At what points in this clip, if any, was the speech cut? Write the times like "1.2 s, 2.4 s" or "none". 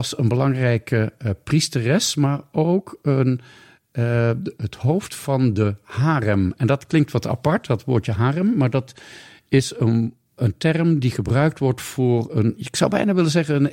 10.4 s